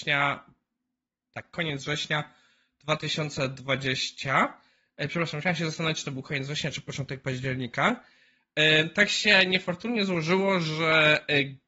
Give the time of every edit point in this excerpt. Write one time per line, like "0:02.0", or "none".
none